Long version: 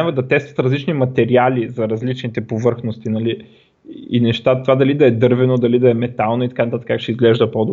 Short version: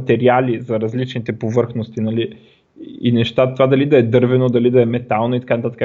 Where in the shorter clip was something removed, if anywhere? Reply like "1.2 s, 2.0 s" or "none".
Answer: none